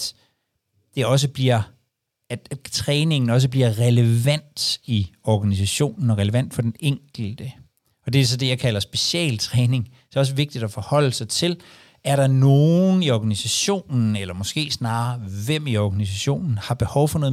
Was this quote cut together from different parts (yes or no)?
no